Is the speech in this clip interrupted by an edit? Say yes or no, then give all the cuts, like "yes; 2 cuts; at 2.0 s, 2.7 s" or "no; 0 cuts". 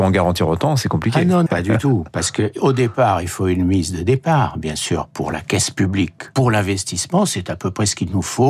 yes; 2 cuts; at 1.5 s, 6.3 s